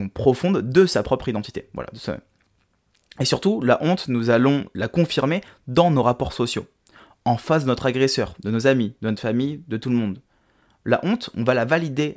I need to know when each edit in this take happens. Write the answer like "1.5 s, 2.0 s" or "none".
none